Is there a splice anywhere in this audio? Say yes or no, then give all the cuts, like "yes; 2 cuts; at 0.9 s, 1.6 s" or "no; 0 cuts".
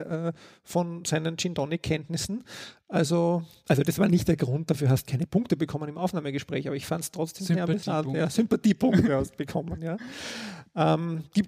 no; 0 cuts